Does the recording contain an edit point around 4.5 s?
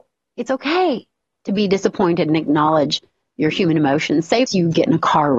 yes; 1 cut; at 4.5 s

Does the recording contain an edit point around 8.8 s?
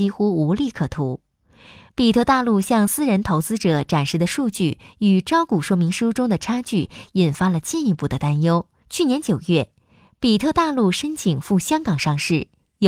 yes; 1 cut; at 8.8 s

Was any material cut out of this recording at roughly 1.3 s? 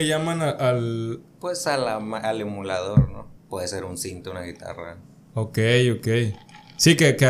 no; 1 cut; at 3.4 s

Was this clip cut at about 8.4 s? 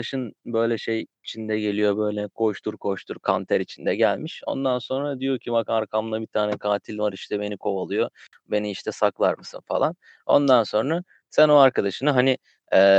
no; 0 cuts

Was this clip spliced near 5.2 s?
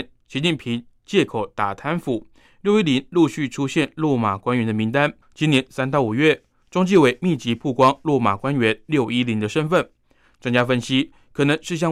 yes; 1 cut; at 5.2 s

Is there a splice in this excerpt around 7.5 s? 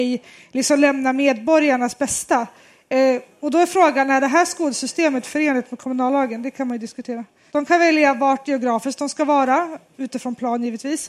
yes; 1 cut; at 7.5 s

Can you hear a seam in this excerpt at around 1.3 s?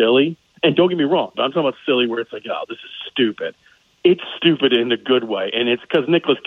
yes; 1 cut; at 1.3 s

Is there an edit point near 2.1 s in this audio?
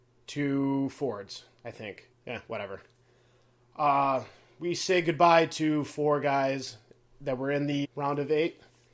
yes; 2 cuts; at 2.1 s, 7.8 s

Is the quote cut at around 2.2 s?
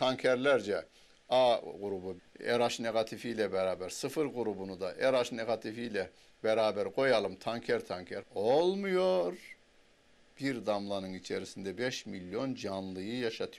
yes; 2 cuts; at 2.2 s, 8.2 s

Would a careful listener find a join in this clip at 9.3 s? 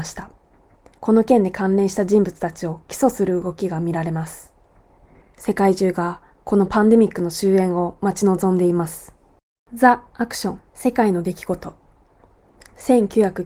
no; 3 cuts; at 1.0 s, 5.2 s, 10.7 s

